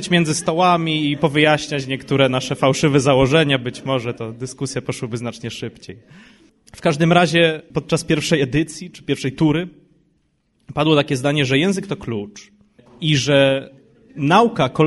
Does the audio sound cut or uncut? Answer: uncut